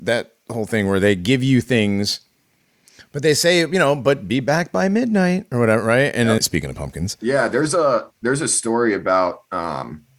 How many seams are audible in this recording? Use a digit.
1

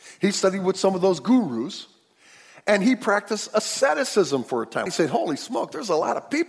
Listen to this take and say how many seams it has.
1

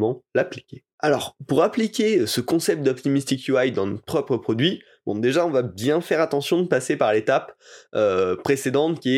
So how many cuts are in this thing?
0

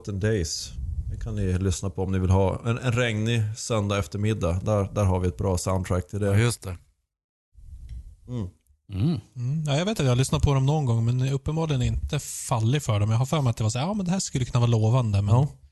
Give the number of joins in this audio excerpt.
0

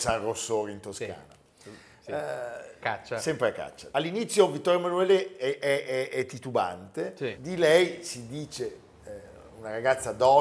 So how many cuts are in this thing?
3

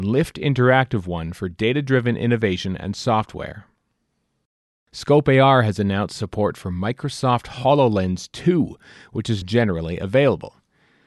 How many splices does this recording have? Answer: 1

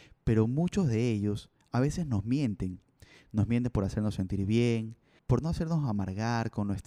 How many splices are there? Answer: 1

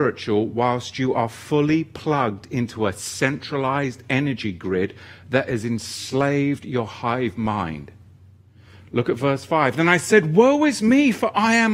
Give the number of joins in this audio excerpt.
0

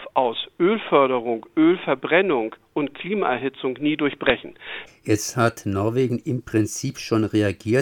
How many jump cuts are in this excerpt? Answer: 1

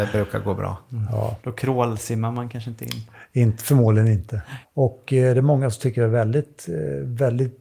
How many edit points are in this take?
2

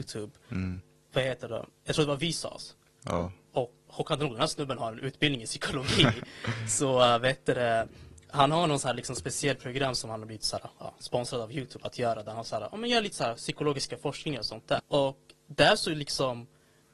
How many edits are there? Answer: 2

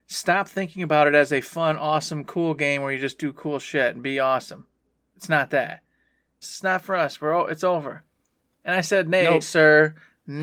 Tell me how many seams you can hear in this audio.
2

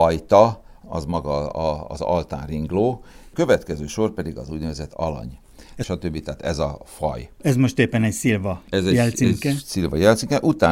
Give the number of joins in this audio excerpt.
1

